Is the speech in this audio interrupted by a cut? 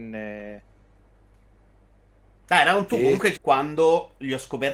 yes; 1 cut; at 3.4 s

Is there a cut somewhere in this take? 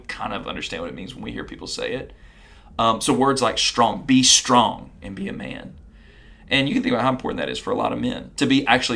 no; 0 cuts

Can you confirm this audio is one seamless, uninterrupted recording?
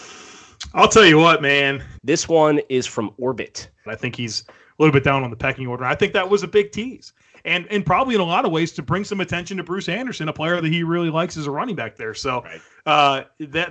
no; 2 cuts; at 2.0 s, 3.9 s

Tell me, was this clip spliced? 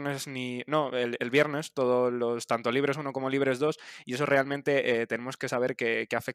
no; 0 cuts

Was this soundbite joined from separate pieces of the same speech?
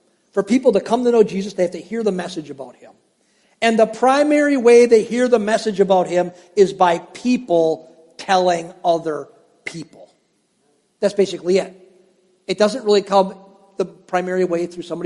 no; 0 cuts

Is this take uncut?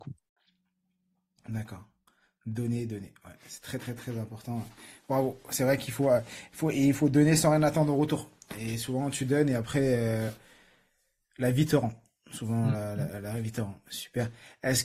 yes; 0 cuts

